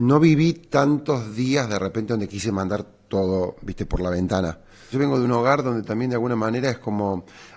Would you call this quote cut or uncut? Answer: cut